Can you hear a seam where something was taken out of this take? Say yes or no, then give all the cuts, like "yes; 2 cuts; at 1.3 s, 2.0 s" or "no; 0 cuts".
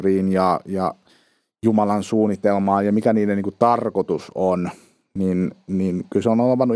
no; 0 cuts